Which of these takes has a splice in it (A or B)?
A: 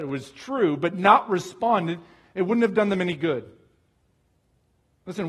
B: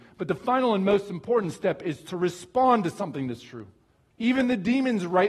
B